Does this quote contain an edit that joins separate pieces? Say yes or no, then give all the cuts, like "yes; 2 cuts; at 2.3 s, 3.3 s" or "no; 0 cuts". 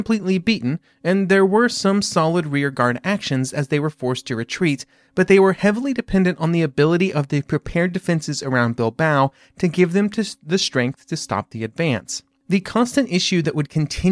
no; 0 cuts